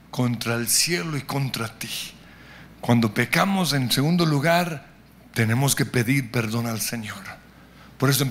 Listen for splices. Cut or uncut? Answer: uncut